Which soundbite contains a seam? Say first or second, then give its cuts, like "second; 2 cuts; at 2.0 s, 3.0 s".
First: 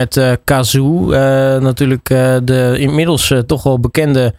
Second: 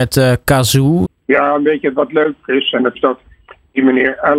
second; 2 cuts; at 1.1 s, 2.9 s